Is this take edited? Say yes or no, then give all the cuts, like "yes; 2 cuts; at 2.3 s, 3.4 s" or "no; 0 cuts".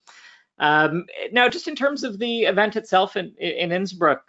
no; 0 cuts